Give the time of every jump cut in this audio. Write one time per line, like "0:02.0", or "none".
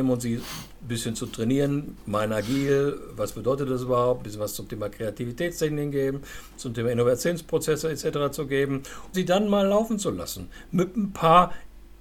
0:09.1